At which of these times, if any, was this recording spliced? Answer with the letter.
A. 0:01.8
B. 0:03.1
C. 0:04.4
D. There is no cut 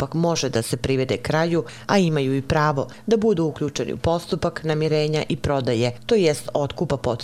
A